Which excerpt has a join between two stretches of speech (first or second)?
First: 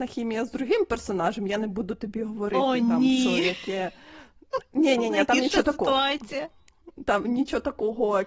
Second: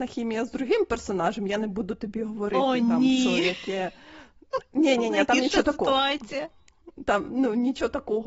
first